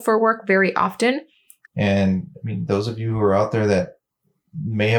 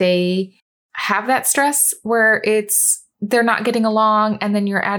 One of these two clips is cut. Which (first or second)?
first